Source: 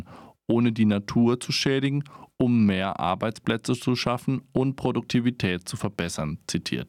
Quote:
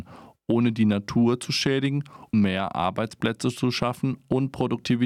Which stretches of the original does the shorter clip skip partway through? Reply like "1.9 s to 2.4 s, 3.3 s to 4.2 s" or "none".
2.3 s to 2.6 s